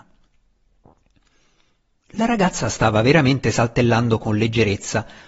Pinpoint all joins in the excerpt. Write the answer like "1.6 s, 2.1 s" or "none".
none